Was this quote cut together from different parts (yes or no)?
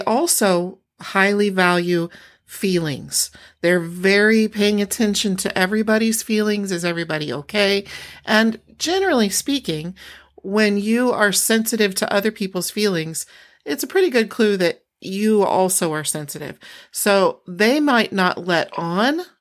no